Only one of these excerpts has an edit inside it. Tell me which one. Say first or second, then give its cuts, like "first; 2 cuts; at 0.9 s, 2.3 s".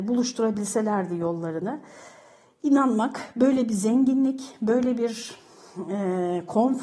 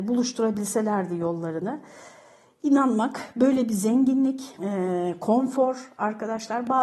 second; 1 cut; at 4.6 s